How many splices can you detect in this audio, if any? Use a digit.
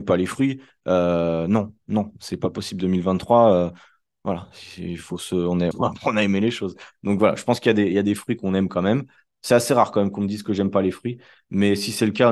1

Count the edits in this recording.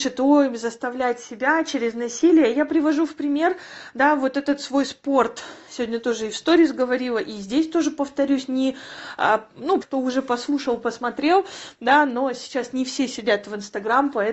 1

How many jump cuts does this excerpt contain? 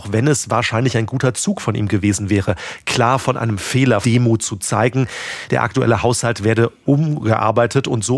2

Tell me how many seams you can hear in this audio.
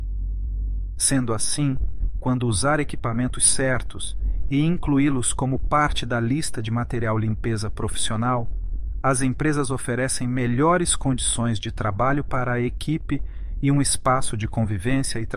1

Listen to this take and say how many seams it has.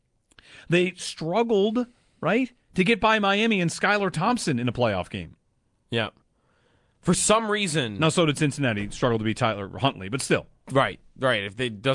0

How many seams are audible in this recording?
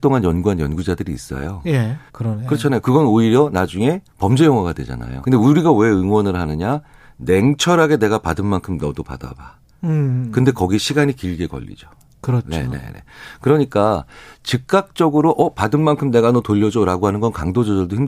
2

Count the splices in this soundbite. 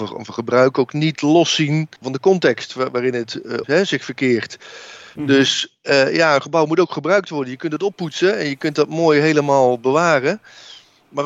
2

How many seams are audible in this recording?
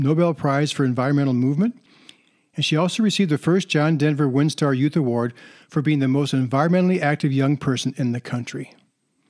0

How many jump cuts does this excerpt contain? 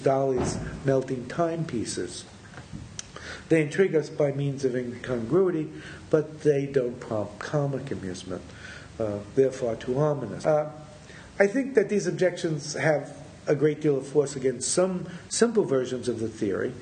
1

